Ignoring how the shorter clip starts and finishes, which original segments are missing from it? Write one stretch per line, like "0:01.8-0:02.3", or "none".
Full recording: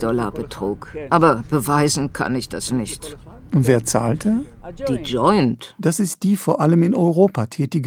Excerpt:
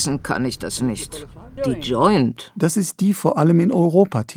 0:03.5-0:04.8

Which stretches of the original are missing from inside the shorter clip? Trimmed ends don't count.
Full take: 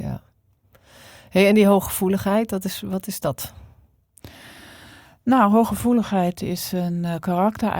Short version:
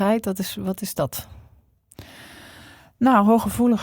none

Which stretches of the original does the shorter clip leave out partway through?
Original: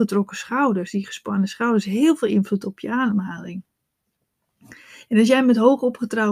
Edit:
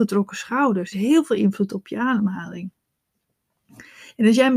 0:00.9-0:01.8

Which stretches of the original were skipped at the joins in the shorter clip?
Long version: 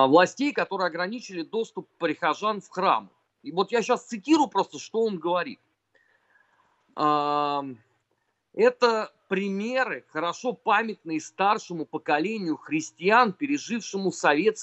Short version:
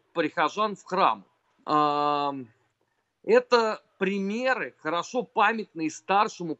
0:03.3-0:06.7

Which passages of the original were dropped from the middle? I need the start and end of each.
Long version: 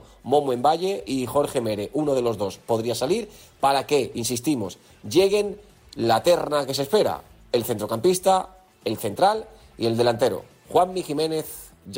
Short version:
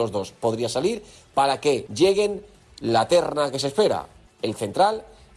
0:04.1-0:05.0
0:07.4-0:08.7

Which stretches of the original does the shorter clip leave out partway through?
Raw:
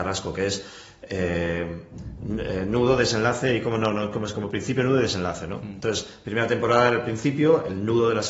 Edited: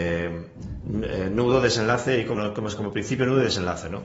0:03.7-0:03.9

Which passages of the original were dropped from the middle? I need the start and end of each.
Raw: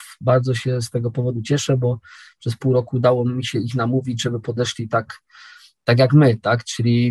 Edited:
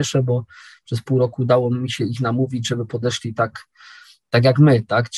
none

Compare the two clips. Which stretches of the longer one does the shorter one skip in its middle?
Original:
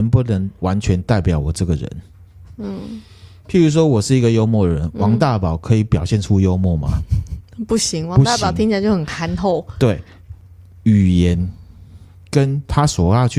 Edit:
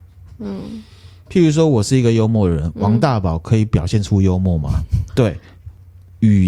0:07.3-0:09.7

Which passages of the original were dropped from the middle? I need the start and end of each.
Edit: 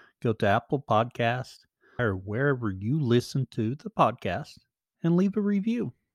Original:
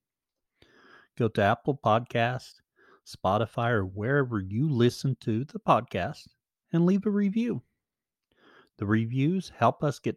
0:02.9-0:03.7

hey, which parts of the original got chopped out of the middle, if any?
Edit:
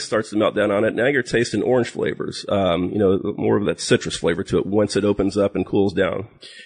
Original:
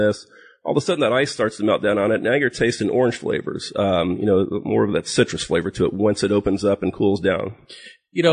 none

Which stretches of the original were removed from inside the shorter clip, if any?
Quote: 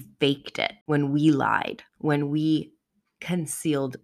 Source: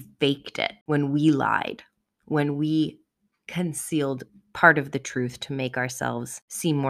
0:01.9-0:02.1

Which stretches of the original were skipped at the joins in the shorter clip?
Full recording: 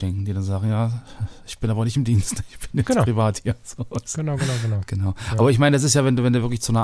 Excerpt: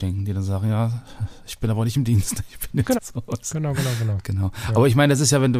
0:03.0-0:03.6

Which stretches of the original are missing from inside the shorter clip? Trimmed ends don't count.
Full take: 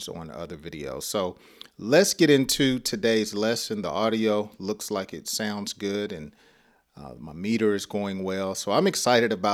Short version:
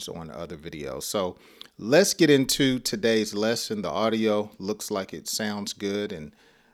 none

